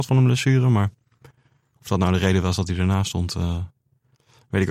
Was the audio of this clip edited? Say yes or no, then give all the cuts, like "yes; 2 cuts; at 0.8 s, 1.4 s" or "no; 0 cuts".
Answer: no; 0 cuts